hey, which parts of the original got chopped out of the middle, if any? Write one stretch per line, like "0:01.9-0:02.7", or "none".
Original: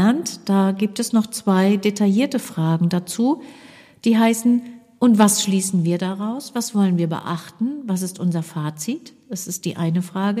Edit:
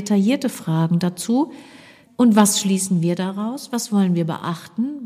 0:04.0-0:04.9